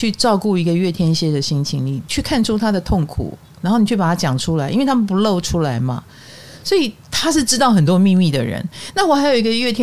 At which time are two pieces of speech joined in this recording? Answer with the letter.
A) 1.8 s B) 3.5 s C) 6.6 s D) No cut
C